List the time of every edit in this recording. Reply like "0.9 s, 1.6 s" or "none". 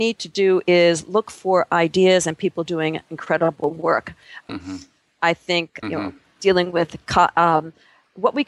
4.5 s, 5.8 s